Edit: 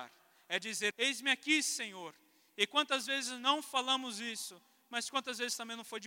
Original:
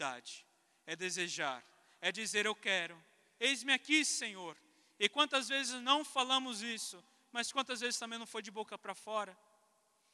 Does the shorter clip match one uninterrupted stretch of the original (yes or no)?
no